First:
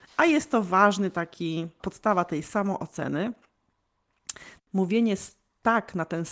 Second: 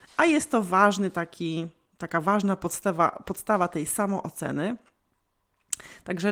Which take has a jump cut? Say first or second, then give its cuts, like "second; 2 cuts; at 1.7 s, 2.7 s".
first; 2 cuts; at 1.8 s, 4.6 s